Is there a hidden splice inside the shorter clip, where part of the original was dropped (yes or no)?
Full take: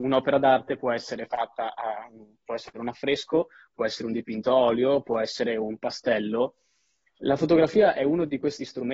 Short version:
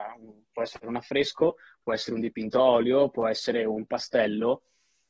no